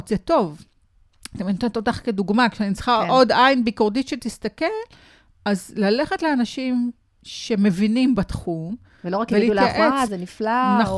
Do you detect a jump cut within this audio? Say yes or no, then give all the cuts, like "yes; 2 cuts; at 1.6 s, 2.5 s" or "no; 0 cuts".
yes; 1 cut; at 10.1 s